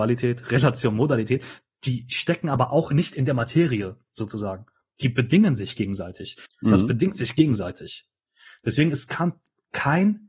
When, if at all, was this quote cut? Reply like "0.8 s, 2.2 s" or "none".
6.5 s

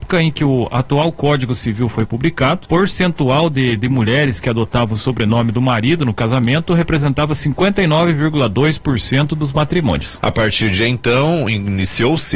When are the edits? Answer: none

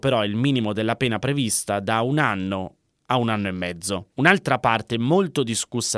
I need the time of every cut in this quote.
4.1 s

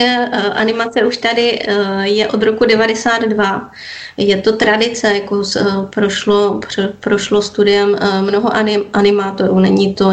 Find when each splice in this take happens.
none

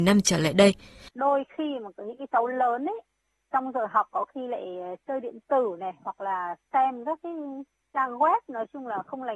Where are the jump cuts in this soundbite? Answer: 1.1 s

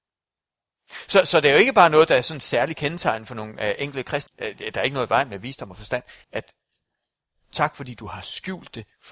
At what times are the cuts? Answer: 4.3 s, 6.2 s

